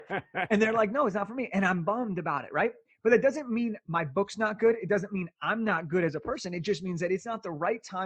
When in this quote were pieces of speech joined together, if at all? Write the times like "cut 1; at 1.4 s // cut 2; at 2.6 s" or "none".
none